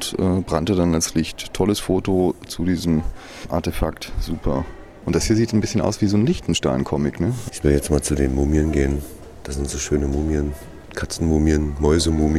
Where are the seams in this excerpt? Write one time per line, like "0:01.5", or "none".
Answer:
0:05.0
0:07.5